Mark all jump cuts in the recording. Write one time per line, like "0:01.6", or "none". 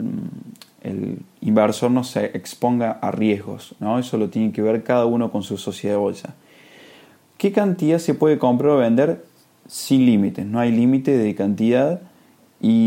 none